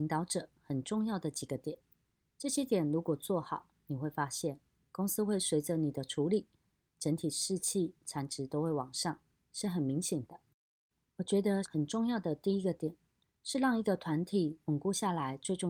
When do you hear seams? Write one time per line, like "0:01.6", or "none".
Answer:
0:11.6
0:13.2